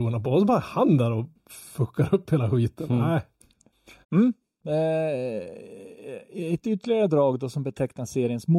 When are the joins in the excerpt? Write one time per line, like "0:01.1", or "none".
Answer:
0:04.0